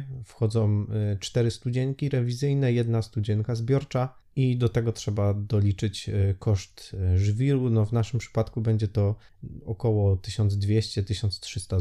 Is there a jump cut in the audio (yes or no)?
no